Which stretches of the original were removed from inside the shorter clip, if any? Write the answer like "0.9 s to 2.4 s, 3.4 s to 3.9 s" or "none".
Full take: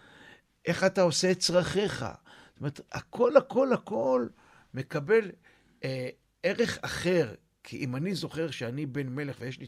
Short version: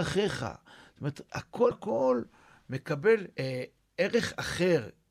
3.3 s to 3.8 s, 5.4 s to 5.8 s